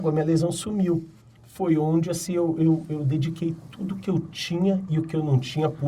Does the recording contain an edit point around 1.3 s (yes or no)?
yes